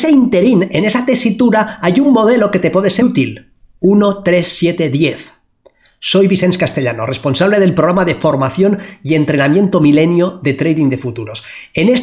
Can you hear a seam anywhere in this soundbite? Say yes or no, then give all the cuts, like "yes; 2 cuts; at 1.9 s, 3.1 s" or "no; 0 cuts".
yes; 1 cut; at 3.0 s